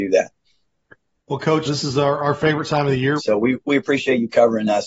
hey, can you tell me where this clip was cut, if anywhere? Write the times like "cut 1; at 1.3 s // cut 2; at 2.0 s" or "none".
cut 1; at 1.7 s // cut 2; at 3.2 s